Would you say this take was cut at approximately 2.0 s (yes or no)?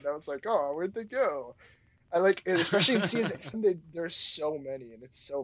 no